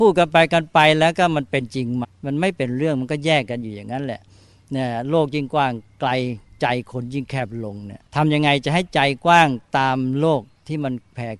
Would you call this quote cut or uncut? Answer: cut